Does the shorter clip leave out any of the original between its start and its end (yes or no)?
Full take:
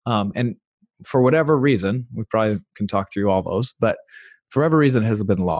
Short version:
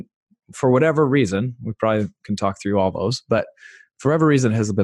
no